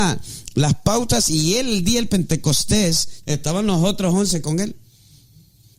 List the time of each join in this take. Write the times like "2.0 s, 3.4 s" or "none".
3.2 s